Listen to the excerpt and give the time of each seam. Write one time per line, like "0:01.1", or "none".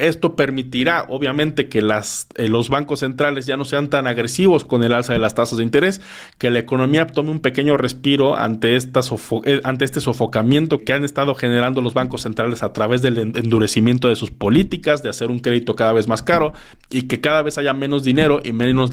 none